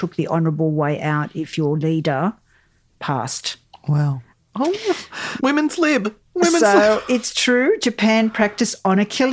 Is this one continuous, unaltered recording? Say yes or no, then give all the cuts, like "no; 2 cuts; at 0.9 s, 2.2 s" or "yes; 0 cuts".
no; 2 cuts; at 4.3 s, 5.4 s